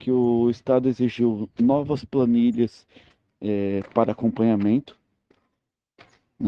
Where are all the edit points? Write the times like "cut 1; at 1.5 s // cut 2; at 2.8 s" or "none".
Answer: none